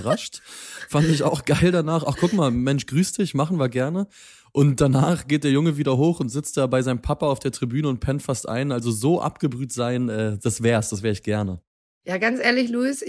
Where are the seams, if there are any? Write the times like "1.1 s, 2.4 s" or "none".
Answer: 10.4 s